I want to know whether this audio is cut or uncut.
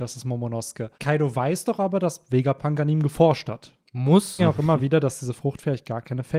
cut